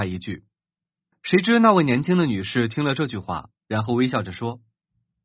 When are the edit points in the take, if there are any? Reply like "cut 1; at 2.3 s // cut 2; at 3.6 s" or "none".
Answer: cut 1; at 1.1 s // cut 2; at 3.6 s